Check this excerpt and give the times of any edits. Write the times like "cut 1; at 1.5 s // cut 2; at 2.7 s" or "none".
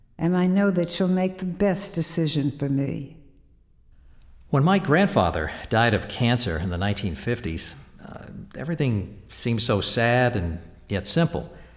none